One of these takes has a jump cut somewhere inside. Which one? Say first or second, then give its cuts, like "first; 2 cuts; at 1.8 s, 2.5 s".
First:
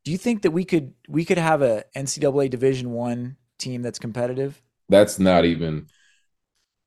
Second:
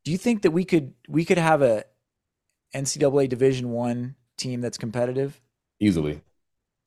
first; 2 cuts; at 1.9 s, 4.8 s